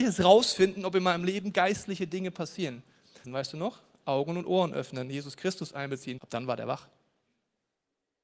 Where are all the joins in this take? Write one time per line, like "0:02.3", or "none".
0:03.2
0:06.2

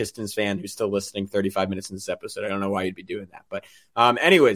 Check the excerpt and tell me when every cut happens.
none

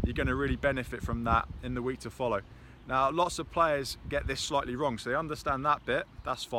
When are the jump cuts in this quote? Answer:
none

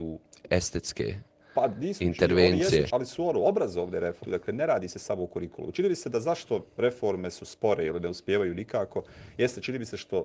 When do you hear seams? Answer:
0:02.9
0:04.2

